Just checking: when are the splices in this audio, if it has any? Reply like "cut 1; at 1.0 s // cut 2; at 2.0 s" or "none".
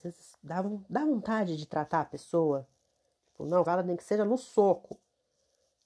cut 1; at 3.7 s